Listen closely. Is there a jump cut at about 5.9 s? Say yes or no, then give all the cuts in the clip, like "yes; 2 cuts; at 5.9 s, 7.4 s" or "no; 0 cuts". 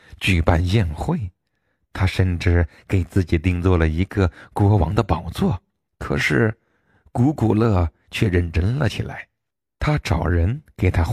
yes; 1 cut; at 5.9 s